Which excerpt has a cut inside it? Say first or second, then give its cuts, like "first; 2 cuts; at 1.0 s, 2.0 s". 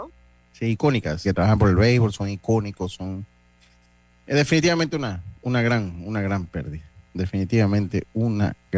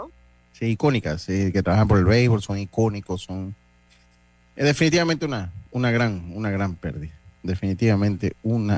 first; 1 cut; at 1.2 s